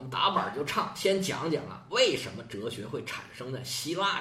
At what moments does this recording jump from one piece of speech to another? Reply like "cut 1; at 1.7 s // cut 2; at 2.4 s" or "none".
none

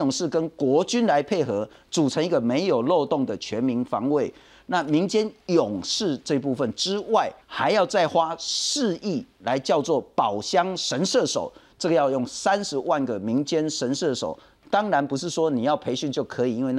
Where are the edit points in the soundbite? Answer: cut 1; at 7.4 s

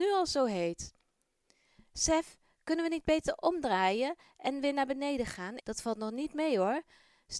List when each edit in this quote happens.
cut 1; at 5.6 s

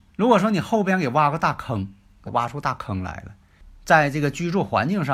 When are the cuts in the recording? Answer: cut 1; at 2.3 s

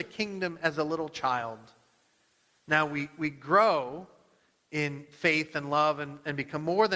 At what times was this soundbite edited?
none

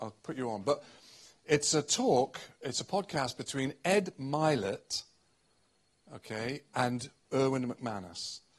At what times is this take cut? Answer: none

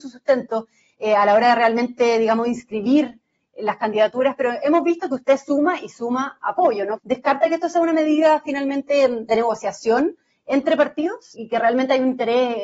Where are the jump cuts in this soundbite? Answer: cut 1; at 7.0 s // cut 2; at 11.3 s

